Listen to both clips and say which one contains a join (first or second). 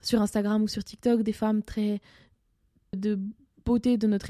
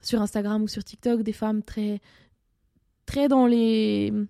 first